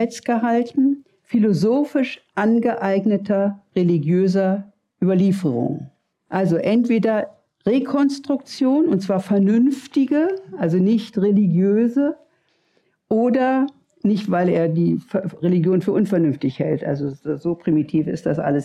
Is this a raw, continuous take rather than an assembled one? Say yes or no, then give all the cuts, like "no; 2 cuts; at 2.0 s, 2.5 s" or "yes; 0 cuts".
no; 1 cut; at 6.1 s